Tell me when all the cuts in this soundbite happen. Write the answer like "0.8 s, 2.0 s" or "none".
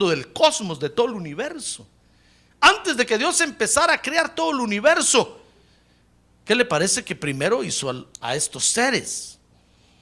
8.1 s